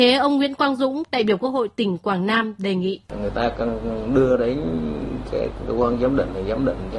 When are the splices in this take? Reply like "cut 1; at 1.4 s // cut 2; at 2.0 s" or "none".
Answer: cut 1; at 3.1 s